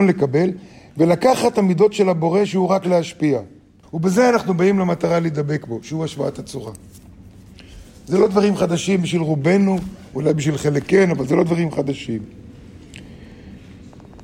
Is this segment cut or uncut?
cut